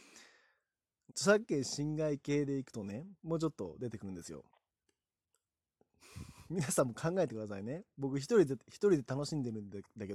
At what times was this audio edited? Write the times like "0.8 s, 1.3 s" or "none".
1.1 s, 3.2 s, 4.5 s